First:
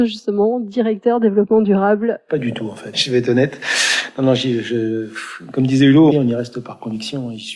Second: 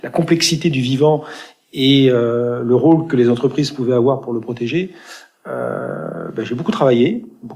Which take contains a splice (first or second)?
first